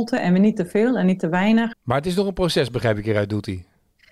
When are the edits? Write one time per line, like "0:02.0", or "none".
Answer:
0:01.7